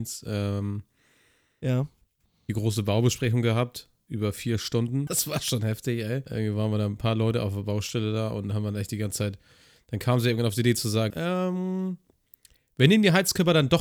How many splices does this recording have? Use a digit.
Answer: 2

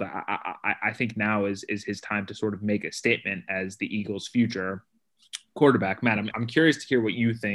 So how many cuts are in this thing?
1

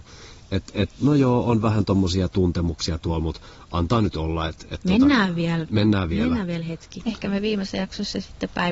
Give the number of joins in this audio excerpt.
1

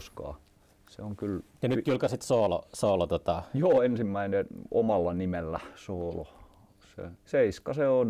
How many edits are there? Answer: 1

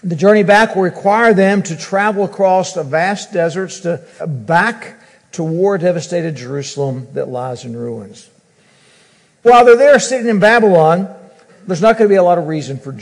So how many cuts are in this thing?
3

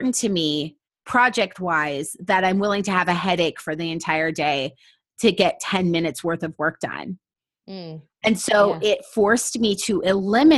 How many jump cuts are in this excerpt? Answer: 0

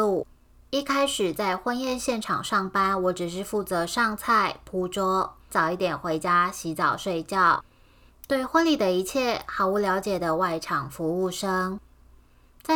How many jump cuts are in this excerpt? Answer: 1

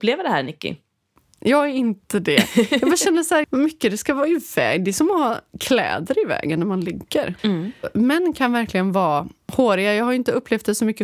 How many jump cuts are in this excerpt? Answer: 2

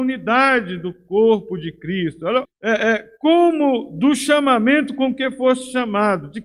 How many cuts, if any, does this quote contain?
1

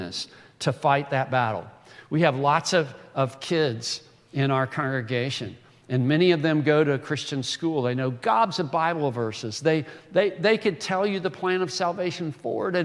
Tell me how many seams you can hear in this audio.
0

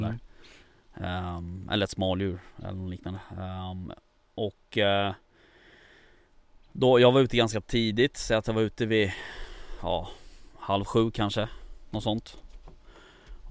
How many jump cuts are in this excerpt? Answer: 0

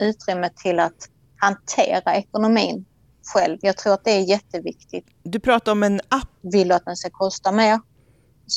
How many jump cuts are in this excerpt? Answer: 1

